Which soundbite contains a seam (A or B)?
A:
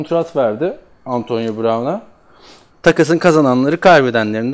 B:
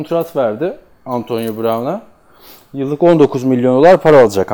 A